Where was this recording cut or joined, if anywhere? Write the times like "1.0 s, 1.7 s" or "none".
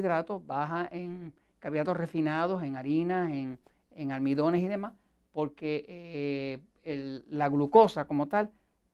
none